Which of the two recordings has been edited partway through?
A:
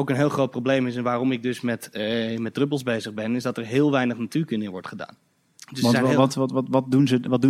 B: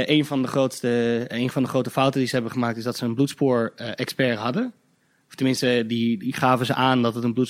A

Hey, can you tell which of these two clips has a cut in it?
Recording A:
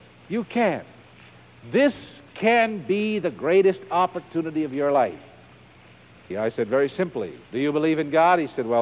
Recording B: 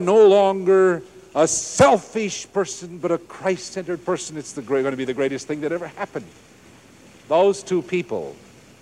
A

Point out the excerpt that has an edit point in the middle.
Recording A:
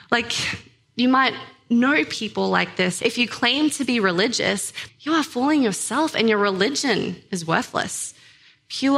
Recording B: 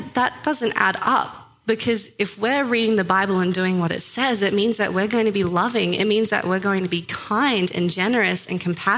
A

